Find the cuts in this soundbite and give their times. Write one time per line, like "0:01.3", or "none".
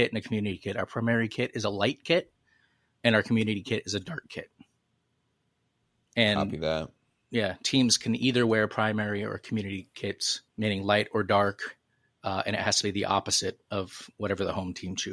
0:10.5